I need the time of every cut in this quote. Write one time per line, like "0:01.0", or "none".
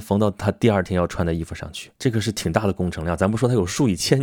0:02.0

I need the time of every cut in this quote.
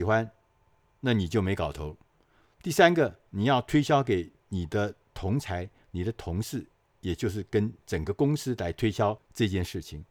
none

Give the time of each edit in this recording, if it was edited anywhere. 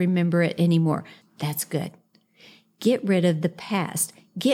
0:01.2

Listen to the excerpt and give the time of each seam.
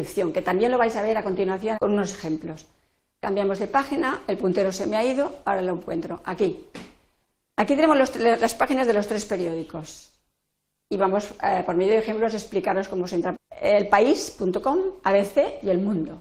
0:01.7
0:13.3

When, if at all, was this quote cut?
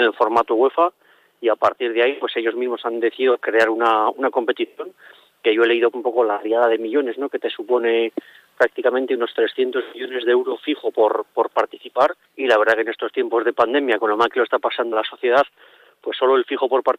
0:05.9
0:12.2
0:14.9

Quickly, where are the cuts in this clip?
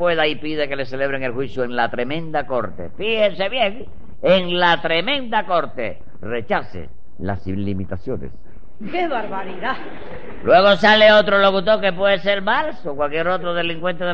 none

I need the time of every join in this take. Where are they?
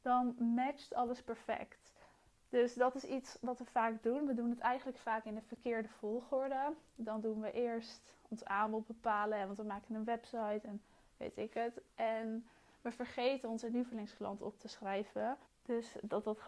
0:15.4

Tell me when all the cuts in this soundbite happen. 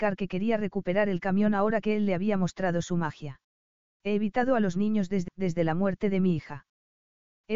0:03.9
0:05.3

